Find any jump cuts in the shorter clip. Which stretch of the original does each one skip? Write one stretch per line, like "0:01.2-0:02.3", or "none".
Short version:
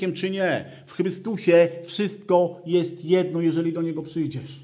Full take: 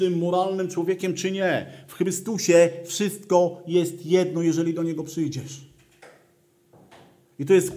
none